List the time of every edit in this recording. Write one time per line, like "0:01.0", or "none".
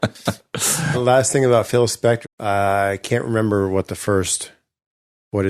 0:00.9
0:02.2

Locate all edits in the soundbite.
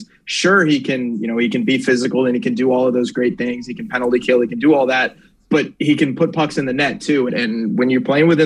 0:07.3

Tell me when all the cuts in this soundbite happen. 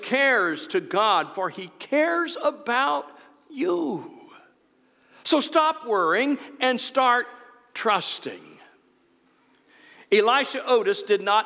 none

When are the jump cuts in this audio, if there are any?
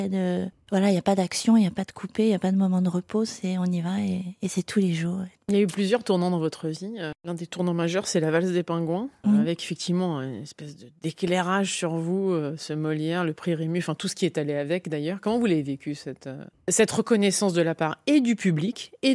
none

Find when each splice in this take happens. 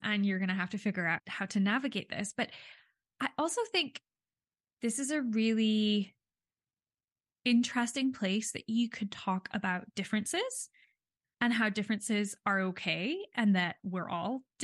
0:01.2

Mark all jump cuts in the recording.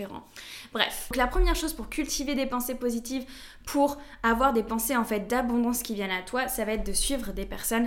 none

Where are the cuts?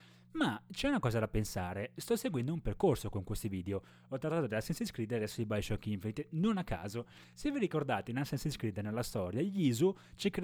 none

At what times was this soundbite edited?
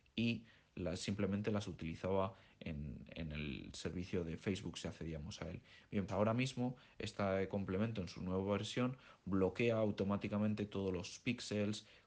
0:06.1

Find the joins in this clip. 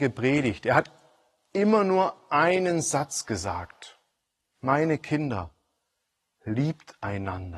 none

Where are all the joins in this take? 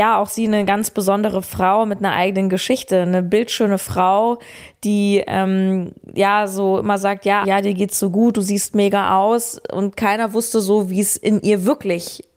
0:07.4

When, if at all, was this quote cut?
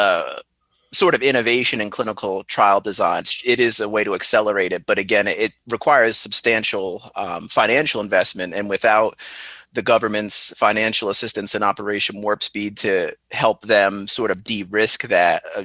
0:03.2

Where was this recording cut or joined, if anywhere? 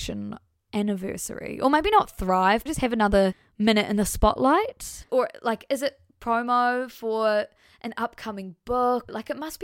0:02.7
0:05.1

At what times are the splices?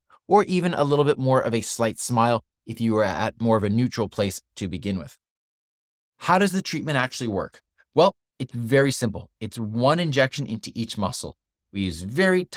none

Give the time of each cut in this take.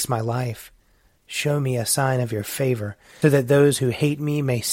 0:01.1
0:03.2

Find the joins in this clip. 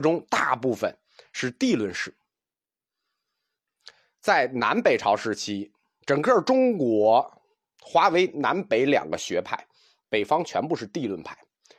none

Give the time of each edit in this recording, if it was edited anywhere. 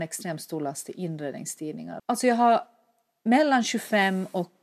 0:02.0

